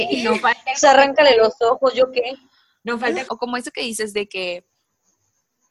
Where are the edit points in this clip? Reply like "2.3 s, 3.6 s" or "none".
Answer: 3.3 s